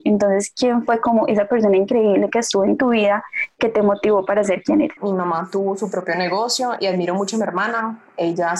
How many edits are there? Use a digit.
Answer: 1